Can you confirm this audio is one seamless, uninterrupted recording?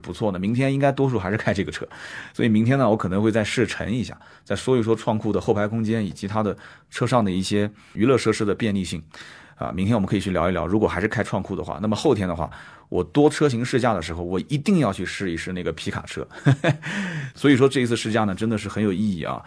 yes; 0 cuts

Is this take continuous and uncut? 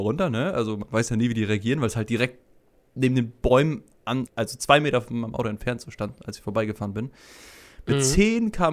no; 1 cut; at 4.3 s

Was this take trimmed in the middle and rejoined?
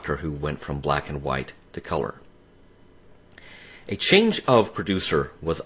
no; 0 cuts

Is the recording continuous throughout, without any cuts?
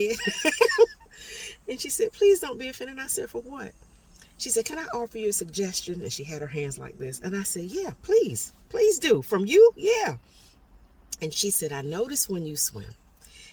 yes; 0 cuts

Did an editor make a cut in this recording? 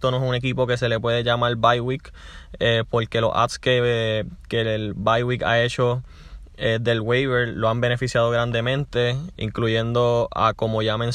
yes; 1 cut; at 9.3 s

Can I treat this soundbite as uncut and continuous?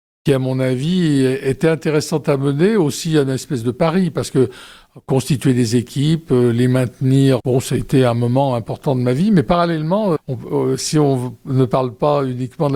no; 2 cuts; at 7.4 s, 10.2 s

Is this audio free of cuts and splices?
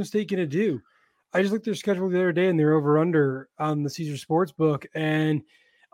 yes; 0 cuts

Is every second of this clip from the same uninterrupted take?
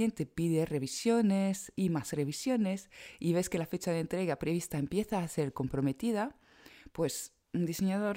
yes; 0 cuts

